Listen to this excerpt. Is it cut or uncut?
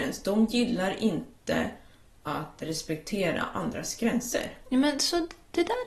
uncut